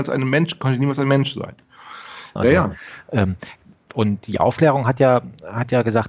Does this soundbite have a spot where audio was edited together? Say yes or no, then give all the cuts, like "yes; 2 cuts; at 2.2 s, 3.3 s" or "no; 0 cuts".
yes; 1 cut; at 2.4 s